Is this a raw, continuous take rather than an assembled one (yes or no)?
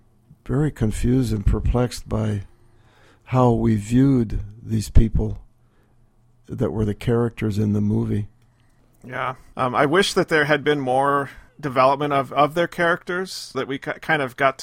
no